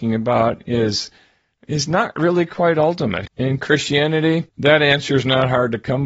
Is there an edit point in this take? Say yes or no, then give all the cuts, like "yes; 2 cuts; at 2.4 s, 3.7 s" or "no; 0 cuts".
yes; 2 cuts; at 3.3 s, 4.5 s